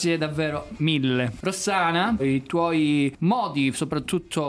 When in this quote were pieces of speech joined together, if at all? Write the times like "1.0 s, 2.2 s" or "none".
2.2 s

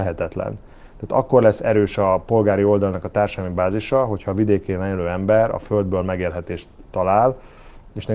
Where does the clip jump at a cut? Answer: none

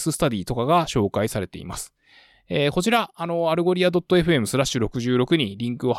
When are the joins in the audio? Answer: none

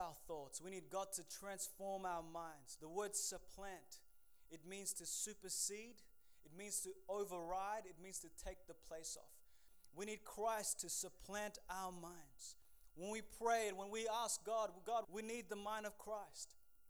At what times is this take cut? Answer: 15.0 s

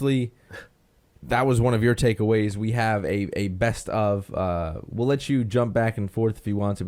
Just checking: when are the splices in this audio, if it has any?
none

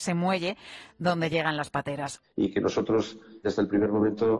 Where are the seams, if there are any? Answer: 2.2 s, 3.4 s

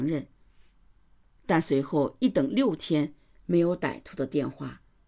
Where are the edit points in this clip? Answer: none

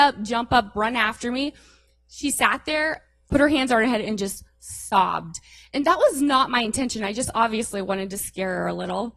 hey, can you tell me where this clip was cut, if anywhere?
3.3 s

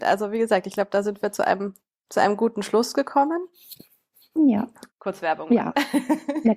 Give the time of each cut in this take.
4.9 s

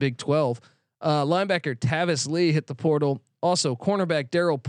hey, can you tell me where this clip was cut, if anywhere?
none

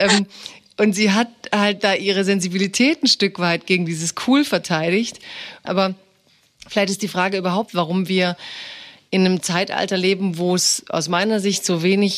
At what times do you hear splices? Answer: 5.6 s

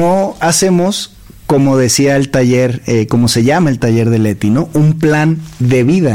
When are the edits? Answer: none

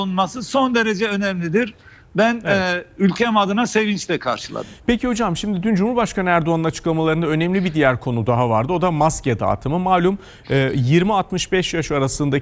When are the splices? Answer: none

